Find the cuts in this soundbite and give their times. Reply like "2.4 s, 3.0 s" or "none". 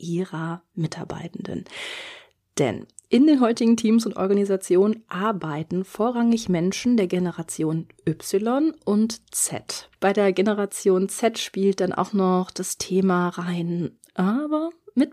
10.0 s, 14.1 s